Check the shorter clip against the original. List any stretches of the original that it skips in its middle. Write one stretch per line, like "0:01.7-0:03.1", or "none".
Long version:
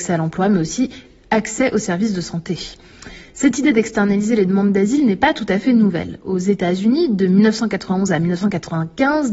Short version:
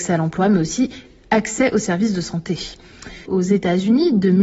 0:03.2-0:06.2